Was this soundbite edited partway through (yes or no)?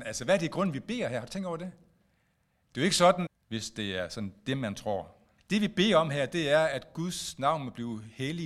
yes